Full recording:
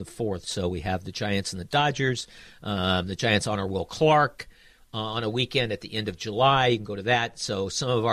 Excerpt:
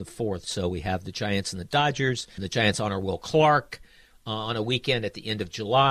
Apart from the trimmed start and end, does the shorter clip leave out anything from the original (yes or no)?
yes